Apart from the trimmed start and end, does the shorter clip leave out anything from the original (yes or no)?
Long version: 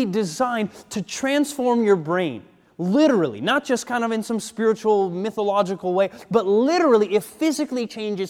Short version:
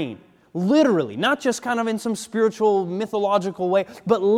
no